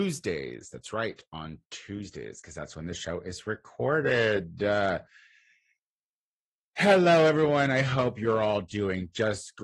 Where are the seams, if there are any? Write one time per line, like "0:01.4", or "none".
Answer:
none